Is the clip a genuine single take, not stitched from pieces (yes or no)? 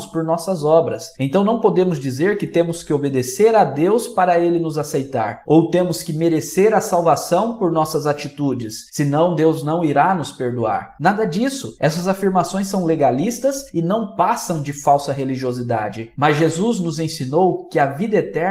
yes